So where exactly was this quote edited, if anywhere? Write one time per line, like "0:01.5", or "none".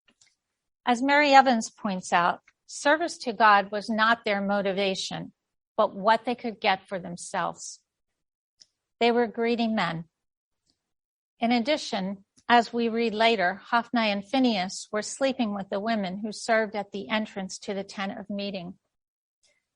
none

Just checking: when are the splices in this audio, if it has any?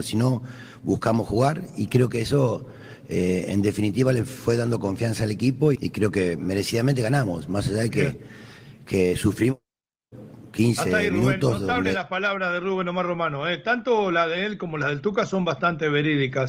0:05.7

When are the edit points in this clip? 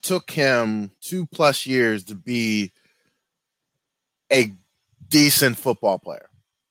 0:01.0

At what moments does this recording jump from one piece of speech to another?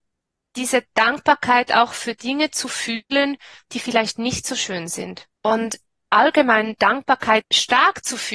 0:05.4
0:07.4

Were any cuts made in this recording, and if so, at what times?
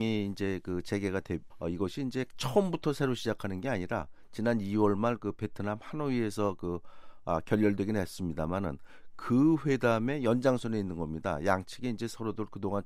0:01.5

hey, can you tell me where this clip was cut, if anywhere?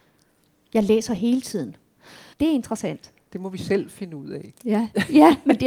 0:02.3

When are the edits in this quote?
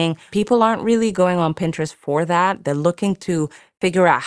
0:02.6

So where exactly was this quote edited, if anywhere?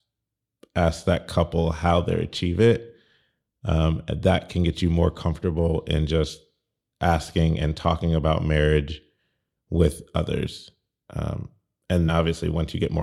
0:12.1

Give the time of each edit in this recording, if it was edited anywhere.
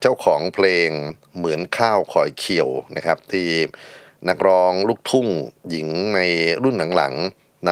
0:05.6

